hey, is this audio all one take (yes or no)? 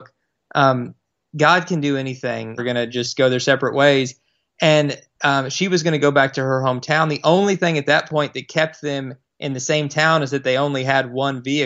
no